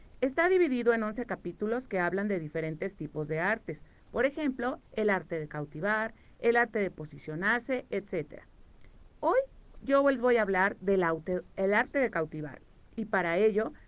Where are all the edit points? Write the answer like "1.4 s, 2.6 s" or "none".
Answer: 4.8 s